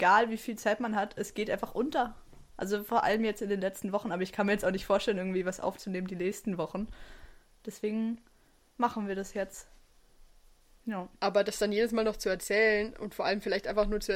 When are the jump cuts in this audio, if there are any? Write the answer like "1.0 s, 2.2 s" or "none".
11.2 s